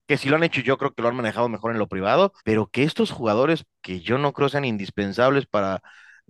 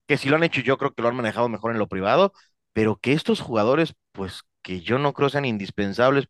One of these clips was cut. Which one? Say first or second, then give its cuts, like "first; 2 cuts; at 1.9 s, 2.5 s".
first; 2 cuts; at 2.4 s, 3.7 s